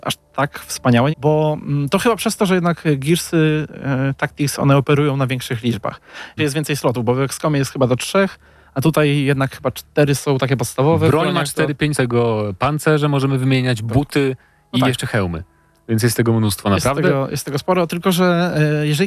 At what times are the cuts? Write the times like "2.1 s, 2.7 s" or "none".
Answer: 1.1 s, 6.4 s, 11.9 s